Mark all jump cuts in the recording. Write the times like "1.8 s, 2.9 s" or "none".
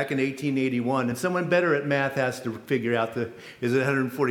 none